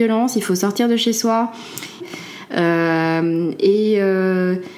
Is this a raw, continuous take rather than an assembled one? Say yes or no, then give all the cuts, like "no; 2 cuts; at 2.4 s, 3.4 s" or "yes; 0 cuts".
no; 1 cut; at 2.0 s